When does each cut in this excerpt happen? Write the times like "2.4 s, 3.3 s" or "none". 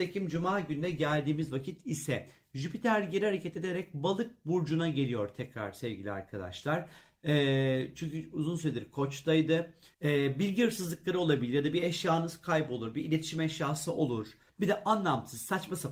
9.9 s, 14.5 s